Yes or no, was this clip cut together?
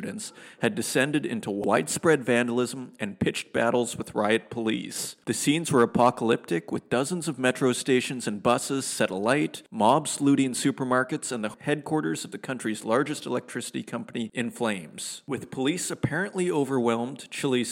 no